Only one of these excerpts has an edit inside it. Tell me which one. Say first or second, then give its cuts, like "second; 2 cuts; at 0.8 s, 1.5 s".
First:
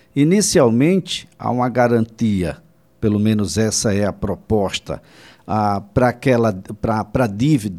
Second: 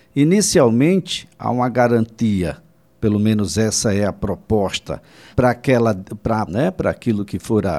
second; 2 cuts; at 5.3 s, 6.5 s